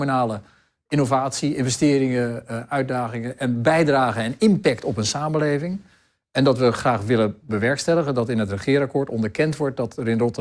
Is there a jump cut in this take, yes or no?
no